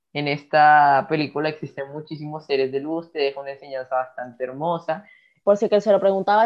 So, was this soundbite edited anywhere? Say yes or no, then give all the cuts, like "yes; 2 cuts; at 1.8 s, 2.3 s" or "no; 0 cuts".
yes; 1 cut; at 5.4 s